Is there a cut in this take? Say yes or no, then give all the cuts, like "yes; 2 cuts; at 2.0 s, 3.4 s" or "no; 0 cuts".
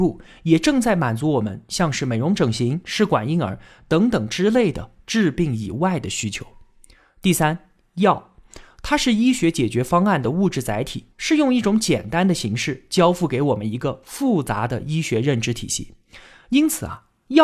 no; 0 cuts